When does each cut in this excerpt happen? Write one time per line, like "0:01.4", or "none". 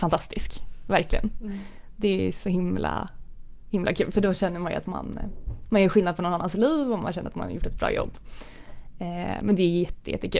none